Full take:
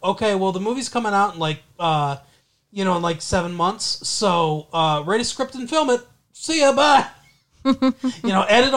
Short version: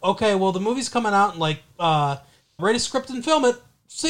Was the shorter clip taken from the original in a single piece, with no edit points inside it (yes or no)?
no